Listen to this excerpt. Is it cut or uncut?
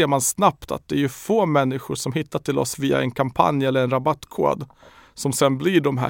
uncut